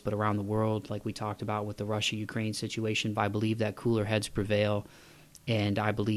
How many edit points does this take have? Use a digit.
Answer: 1